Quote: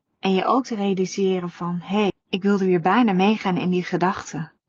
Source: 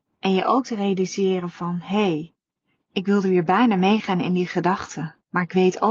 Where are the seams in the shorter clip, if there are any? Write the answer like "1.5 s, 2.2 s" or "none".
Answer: 2.1 s